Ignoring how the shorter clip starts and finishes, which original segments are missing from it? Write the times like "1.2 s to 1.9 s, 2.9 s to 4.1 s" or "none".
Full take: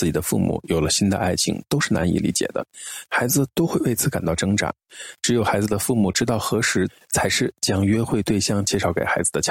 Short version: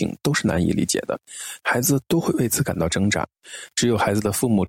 none